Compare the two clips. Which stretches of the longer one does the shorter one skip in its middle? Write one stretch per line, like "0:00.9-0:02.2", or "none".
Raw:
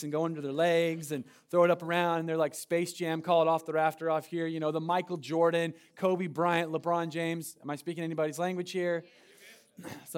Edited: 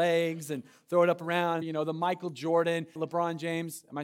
0:02.2-0:04.5
0:05.8-0:06.7